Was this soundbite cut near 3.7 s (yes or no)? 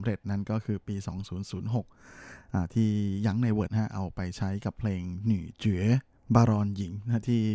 yes